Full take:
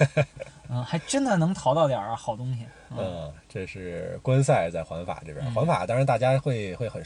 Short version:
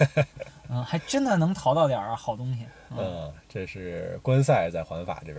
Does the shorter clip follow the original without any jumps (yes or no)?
yes